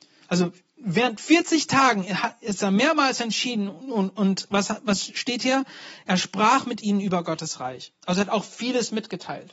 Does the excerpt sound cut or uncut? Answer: uncut